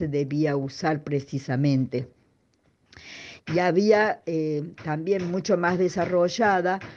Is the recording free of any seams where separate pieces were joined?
no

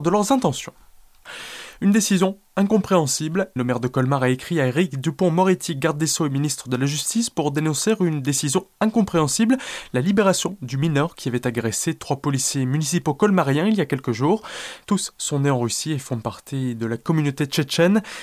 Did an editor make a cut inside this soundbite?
yes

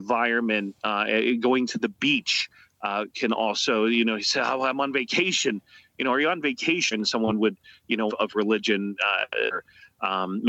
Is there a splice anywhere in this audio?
yes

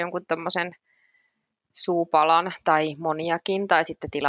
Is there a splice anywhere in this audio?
no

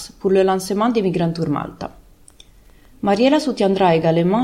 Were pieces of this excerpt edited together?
no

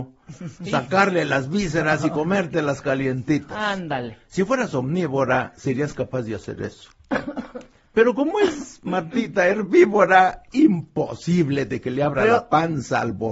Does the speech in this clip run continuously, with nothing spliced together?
yes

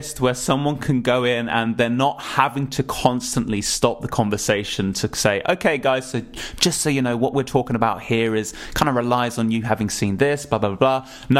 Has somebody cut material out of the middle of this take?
no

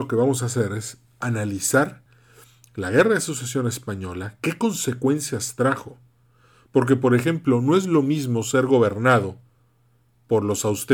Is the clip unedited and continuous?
yes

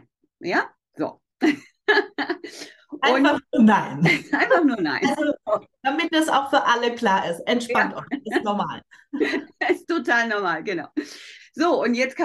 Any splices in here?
no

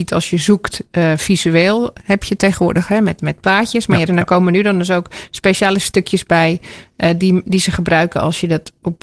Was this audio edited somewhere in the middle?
yes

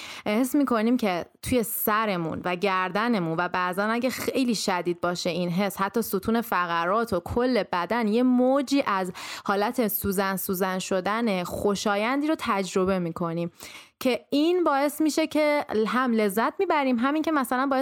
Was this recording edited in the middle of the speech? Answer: no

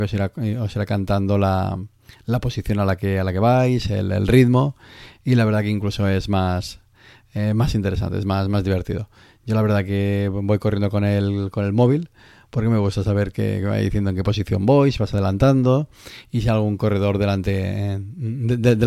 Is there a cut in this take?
no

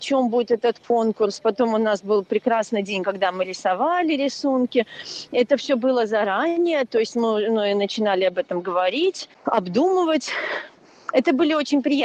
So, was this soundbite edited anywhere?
no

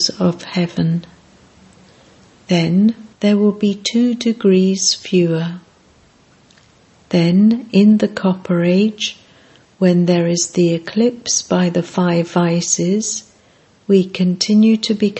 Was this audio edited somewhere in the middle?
yes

